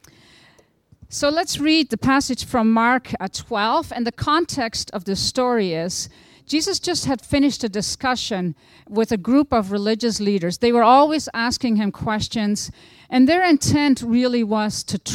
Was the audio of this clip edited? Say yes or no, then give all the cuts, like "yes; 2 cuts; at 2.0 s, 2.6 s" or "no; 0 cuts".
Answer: no; 0 cuts